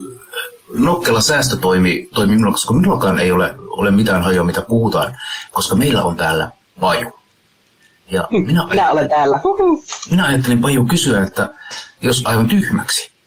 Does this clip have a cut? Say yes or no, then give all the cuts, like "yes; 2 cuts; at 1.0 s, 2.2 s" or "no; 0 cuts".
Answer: yes; 1 cut; at 12.2 s